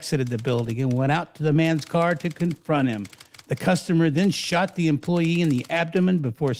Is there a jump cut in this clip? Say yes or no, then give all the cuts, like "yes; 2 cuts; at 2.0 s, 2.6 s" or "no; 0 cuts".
no; 0 cuts